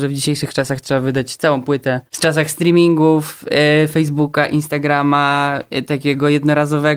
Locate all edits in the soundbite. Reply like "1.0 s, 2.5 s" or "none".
2.1 s